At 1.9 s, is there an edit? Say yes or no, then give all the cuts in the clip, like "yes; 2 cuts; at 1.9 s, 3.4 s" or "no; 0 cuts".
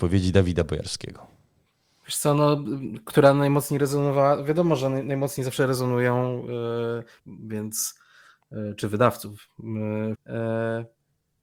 no; 2 cuts; at 7.2 s, 10.1 s